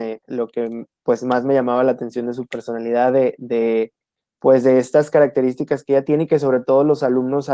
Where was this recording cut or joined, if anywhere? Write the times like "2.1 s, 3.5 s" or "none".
none